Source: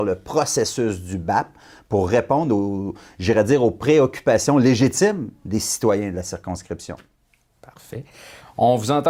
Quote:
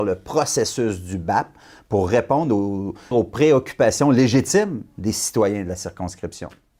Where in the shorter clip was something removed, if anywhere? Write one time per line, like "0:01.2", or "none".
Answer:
0:03.1